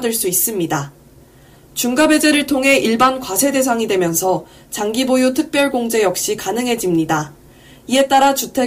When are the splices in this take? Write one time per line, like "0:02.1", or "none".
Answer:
0:01.6